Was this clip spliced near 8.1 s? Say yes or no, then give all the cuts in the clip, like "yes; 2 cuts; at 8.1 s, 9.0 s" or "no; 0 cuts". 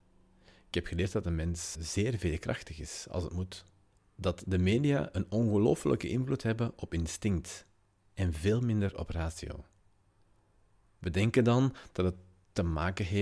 no; 3 cuts; at 1.7 s, 4.0 s, 10.8 s